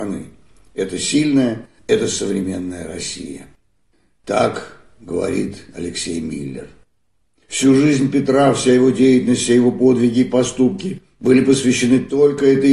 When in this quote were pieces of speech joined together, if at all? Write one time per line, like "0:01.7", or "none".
0:01.8